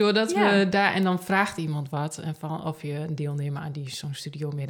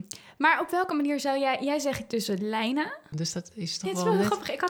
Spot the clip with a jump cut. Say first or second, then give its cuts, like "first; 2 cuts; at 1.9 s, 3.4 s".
second; 1 cut; at 3.1 s